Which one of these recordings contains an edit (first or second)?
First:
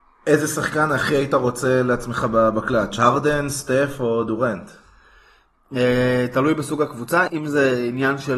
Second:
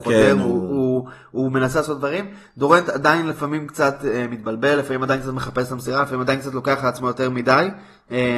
first